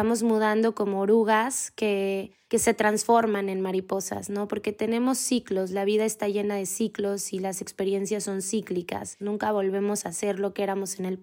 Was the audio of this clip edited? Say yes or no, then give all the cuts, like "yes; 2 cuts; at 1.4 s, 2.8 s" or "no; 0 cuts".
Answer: yes; 1 cut; at 9.2 s